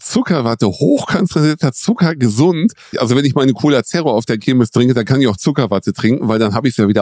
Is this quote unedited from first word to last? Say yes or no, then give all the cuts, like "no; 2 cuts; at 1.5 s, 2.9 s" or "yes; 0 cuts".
no; 1 cut; at 2.9 s